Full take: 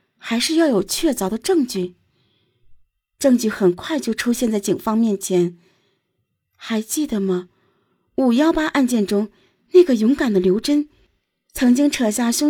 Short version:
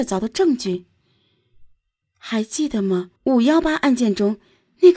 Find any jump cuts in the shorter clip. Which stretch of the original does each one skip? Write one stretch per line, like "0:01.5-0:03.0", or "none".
0:03.1-0:06.4
0:07.5-0:08.1

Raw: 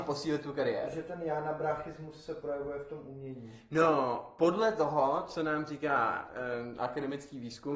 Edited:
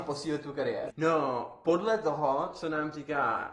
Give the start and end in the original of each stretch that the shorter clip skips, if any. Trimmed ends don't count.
0:00.9-0:03.6

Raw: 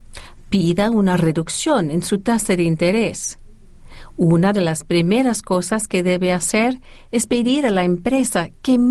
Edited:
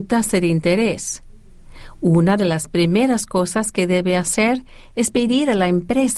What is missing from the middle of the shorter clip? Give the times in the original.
none

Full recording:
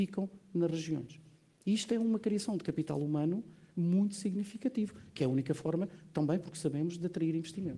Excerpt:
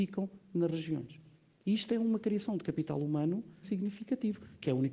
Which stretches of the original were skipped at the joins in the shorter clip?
0:03.6-0:04.2

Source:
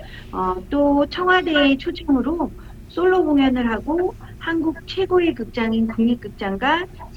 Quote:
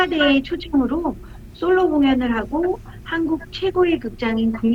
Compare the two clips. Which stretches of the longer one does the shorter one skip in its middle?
none

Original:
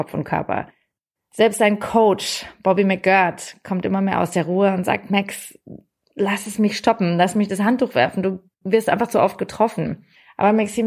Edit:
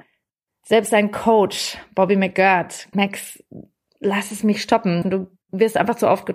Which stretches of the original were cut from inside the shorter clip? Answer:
0:03.6-0:05.1
0:07.2-0:08.1

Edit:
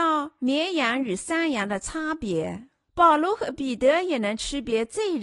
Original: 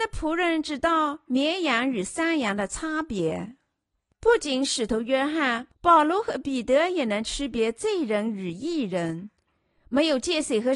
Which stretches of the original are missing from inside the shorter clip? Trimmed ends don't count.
0:03.8-0:05.7

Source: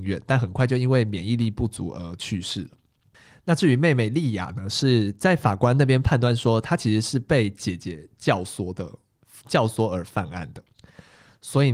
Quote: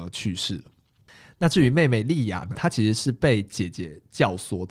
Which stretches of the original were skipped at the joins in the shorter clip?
0:04.6-0:06.6

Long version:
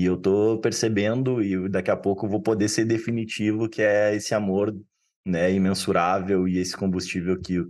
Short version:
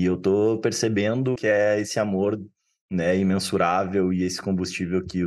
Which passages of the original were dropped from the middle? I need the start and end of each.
0:01.4-0:03.7

